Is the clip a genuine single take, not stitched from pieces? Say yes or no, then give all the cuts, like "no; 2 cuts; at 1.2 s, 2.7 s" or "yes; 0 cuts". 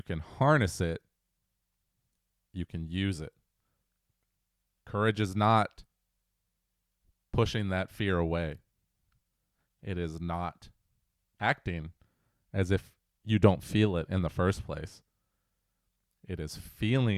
yes; 0 cuts